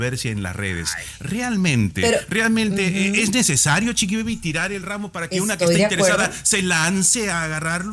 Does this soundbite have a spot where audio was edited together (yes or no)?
no